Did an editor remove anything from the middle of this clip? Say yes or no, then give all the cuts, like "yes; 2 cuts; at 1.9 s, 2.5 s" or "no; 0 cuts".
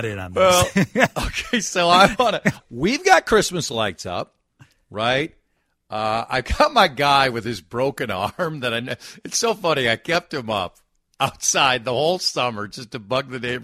yes; 1 cut; at 2.6 s